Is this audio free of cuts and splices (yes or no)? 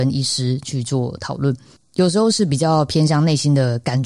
yes